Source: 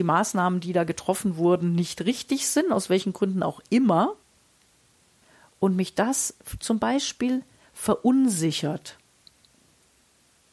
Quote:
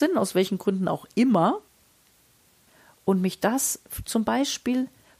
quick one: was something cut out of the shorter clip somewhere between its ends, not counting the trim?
no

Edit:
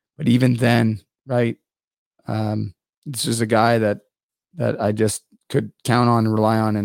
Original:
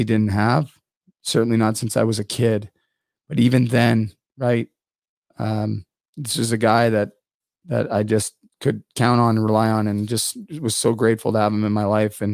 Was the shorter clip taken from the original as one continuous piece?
yes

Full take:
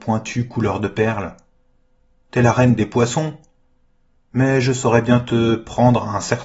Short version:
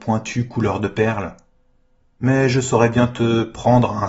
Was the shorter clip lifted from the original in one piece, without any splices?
no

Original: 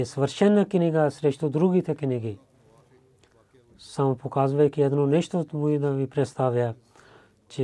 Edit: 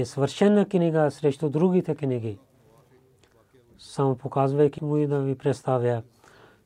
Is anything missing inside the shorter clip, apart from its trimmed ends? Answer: yes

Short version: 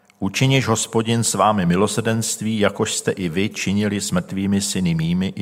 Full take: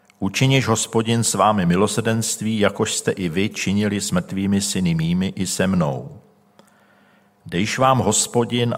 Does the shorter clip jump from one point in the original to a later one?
no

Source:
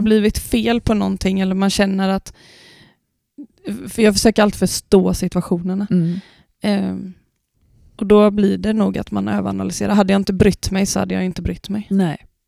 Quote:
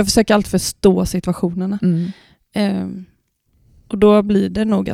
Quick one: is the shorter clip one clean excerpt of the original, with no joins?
yes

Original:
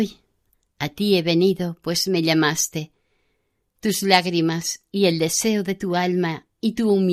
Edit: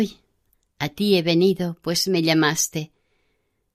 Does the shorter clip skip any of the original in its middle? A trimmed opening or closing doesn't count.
no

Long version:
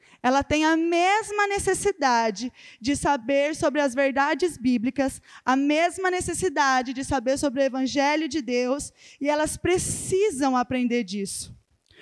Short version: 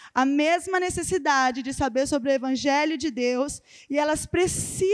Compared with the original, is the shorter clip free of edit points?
yes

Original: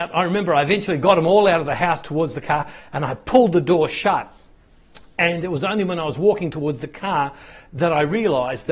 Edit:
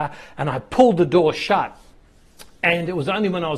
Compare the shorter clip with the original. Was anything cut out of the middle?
no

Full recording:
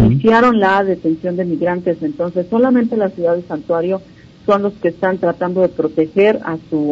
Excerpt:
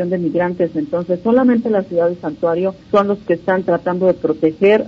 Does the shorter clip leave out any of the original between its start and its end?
yes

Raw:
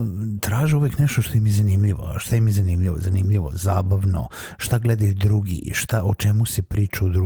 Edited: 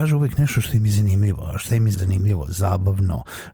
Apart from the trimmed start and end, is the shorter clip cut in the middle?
yes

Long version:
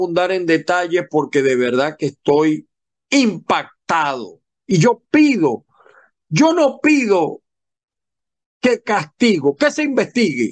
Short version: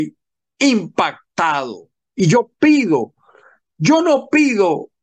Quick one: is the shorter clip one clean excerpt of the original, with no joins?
yes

